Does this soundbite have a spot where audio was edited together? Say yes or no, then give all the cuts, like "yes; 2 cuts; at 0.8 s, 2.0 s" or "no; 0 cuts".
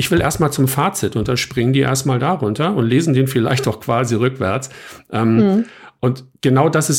no; 0 cuts